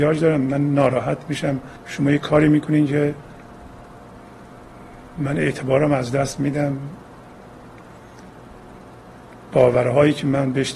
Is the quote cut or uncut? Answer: cut